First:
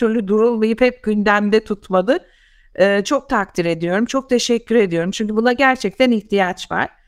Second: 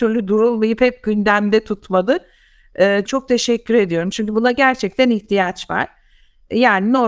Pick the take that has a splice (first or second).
second